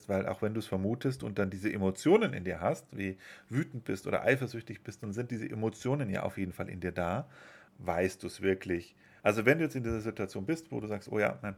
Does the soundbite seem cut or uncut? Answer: cut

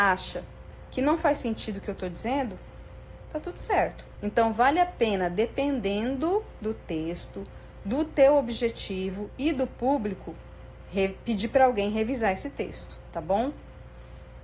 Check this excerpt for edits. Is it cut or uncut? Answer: cut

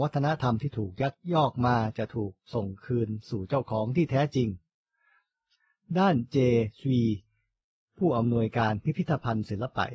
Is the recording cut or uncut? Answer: uncut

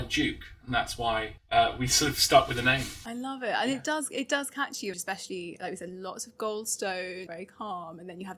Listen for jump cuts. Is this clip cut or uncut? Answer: cut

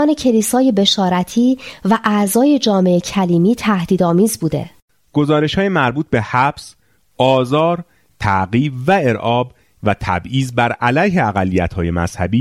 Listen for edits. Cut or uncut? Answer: uncut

